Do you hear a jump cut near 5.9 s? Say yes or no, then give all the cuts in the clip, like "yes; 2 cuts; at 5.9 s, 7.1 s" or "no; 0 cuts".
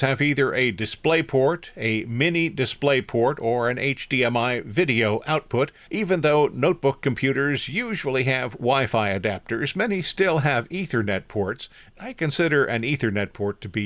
yes; 1 cut; at 5.9 s